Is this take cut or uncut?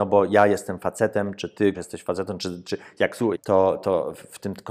cut